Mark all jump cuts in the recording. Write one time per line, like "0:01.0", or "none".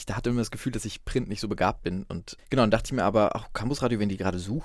0:02.4